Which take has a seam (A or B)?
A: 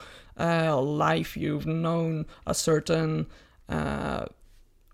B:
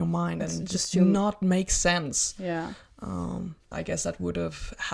B